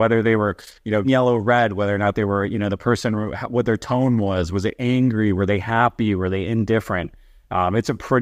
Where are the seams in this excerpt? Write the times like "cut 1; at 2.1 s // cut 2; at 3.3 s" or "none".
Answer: cut 1; at 1.0 s